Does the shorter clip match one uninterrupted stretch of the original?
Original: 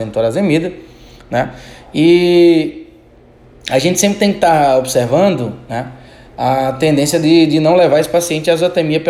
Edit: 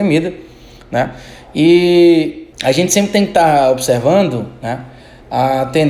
no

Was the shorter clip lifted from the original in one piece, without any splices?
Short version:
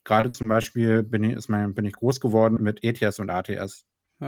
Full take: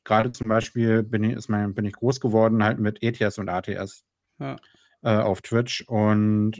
no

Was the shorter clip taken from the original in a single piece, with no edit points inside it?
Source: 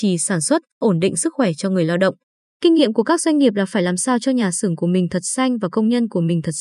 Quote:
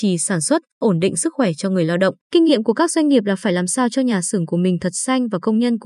no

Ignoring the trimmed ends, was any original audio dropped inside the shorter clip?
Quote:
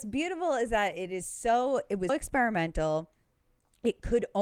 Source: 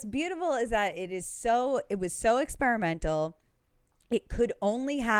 yes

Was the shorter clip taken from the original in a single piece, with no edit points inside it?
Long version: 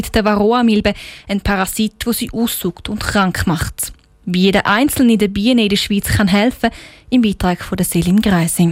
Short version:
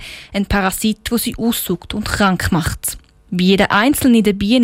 yes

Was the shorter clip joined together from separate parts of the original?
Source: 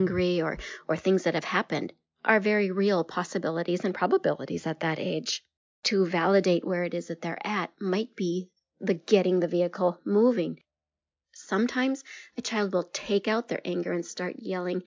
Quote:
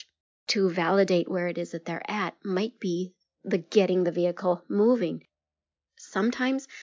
no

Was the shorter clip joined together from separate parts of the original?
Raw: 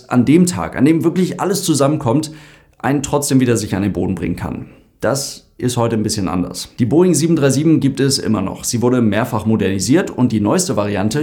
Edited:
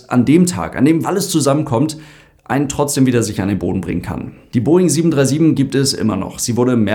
yes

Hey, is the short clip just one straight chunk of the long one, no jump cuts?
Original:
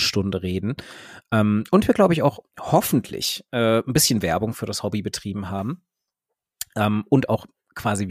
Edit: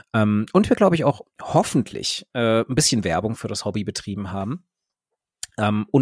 yes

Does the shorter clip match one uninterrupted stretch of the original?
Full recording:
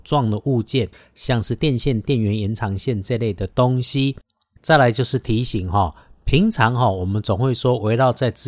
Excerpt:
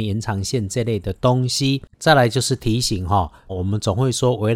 no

